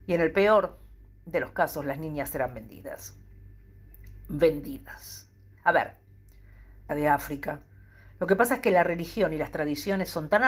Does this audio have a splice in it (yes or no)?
yes